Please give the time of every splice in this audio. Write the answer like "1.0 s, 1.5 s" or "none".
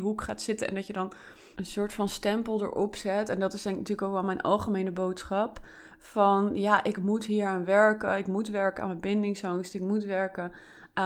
none